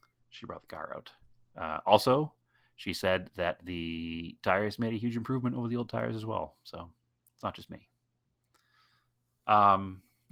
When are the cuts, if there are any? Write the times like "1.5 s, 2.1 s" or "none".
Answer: none